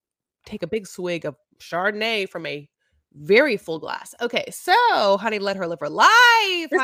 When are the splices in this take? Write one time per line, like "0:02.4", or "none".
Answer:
none